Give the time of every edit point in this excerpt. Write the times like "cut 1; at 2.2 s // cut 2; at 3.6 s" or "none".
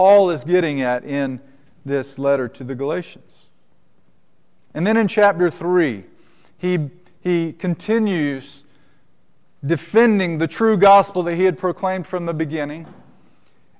none